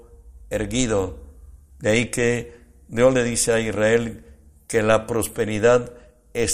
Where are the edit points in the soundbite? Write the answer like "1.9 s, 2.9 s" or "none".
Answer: 1.7 s